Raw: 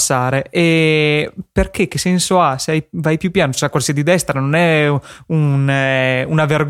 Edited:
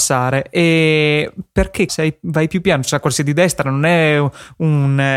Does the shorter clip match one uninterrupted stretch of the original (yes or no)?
no